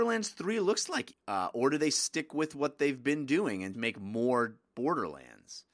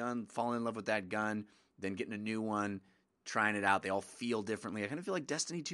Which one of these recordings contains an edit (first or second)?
first